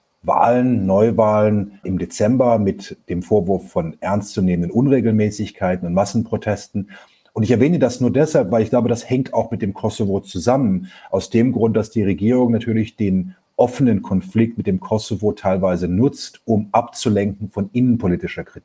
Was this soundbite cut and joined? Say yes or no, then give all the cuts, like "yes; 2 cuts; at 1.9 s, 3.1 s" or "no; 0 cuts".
no; 0 cuts